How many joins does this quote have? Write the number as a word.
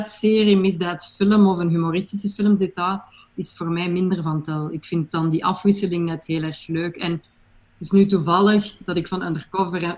zero